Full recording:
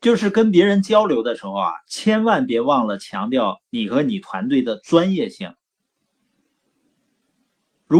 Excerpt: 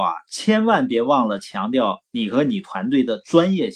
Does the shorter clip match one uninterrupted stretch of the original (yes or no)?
yes